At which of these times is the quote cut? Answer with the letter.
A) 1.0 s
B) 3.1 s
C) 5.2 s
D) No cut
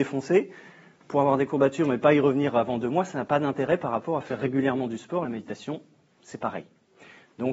D